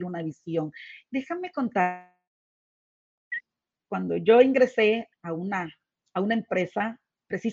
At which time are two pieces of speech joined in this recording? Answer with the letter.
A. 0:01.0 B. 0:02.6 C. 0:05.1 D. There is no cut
C